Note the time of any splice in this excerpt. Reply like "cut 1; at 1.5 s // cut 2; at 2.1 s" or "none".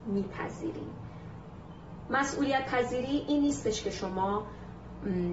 cut 1; at 2.1 s